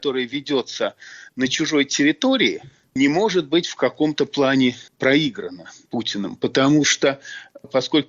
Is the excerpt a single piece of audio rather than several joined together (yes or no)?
yes